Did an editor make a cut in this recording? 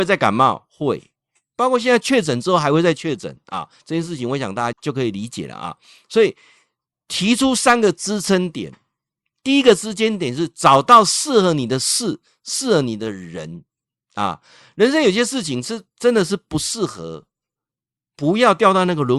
yes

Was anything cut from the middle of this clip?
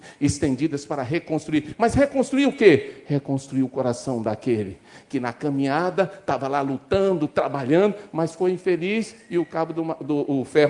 no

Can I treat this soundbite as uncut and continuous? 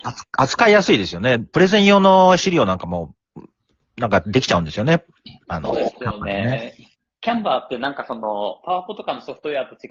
yes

